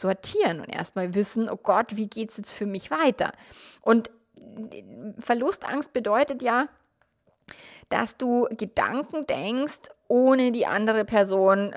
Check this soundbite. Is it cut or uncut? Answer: uncut